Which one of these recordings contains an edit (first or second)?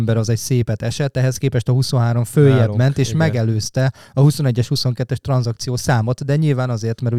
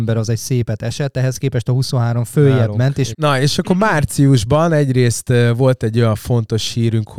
second